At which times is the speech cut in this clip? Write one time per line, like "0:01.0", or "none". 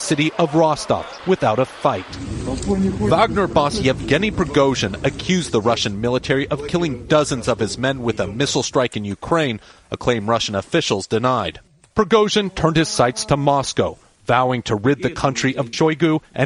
none